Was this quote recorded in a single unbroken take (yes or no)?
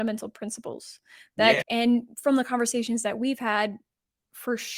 no